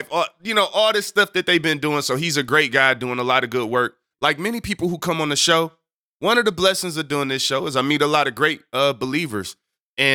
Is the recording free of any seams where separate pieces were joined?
no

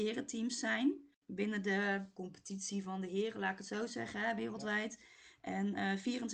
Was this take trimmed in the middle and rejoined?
no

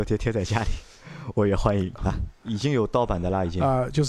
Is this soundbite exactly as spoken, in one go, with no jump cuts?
no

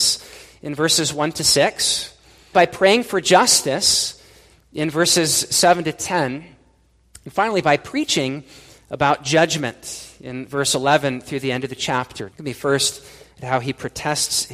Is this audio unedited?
no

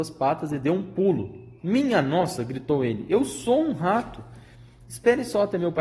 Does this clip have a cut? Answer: no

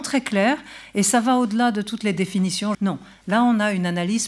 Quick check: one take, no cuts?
no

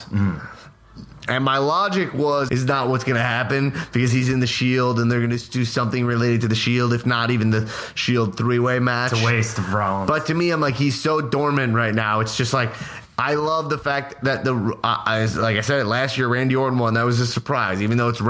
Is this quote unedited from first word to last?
no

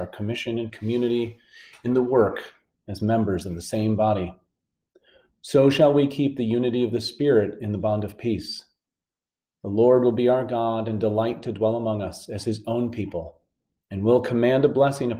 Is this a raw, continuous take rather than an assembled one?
yes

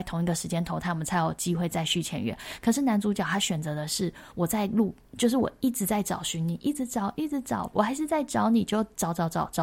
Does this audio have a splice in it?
yes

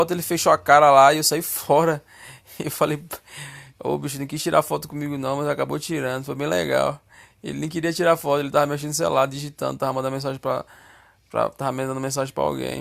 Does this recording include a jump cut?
no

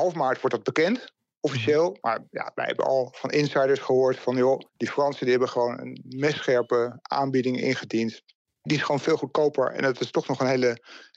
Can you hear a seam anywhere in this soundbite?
yes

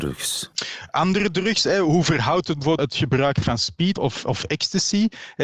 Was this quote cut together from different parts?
yes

